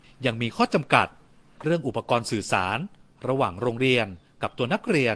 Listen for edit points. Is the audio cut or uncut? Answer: uncut